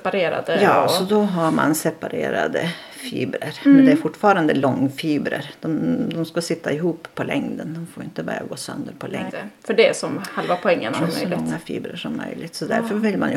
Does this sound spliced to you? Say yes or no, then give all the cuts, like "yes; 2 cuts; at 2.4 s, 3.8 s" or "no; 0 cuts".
yes; 2 cuts; at 9.3 s, 10.9 s